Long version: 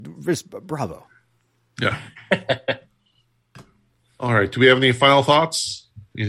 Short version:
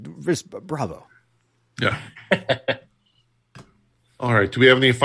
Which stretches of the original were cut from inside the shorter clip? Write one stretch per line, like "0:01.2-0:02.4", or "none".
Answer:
none